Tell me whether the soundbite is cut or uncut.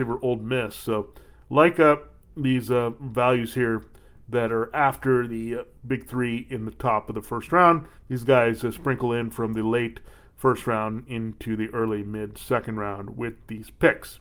uncut